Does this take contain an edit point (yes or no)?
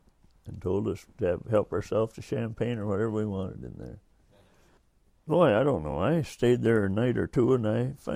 no